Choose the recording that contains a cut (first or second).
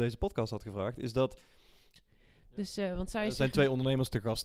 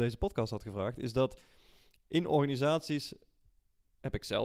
first